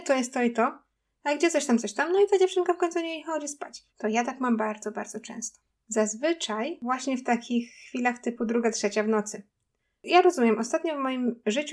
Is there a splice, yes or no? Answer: yes